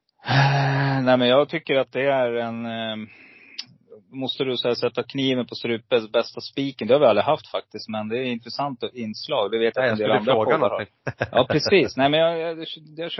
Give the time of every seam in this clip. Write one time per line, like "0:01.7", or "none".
none